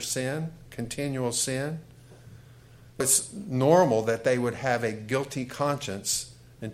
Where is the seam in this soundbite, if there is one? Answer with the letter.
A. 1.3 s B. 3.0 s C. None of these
B